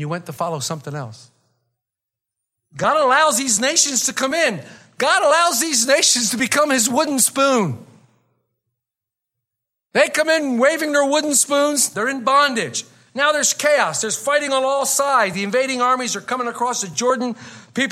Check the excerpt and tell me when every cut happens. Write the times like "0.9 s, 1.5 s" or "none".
11.9 s